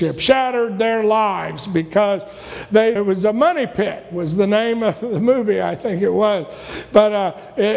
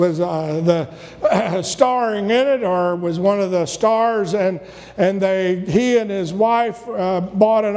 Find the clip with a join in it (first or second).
first